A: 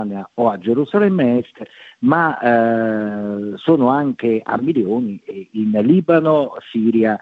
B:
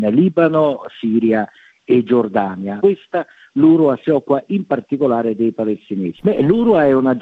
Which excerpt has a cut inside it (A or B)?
B